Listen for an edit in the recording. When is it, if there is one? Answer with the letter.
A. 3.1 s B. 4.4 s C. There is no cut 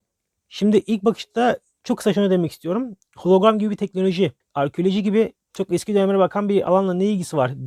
B